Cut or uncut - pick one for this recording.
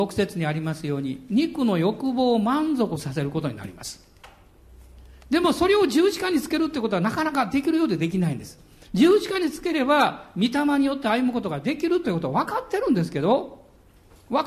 uncut